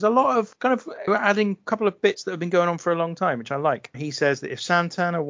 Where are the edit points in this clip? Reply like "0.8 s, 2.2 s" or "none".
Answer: 1.1 s, 3.9 s